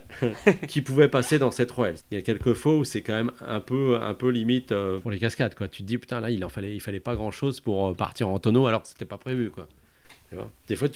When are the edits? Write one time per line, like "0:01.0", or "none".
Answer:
0:02.0